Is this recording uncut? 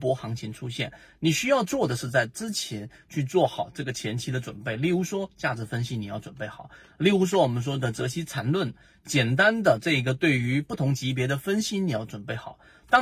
yes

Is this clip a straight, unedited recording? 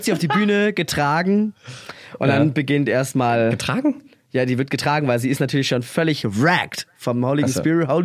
yes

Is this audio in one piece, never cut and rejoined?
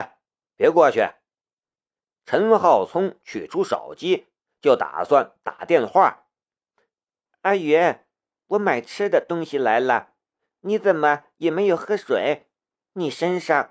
no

